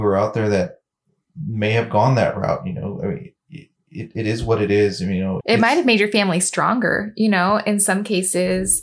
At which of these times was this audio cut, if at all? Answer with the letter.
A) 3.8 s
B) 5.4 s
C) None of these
B